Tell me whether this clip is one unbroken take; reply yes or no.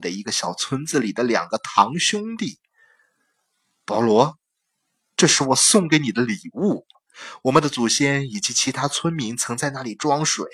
no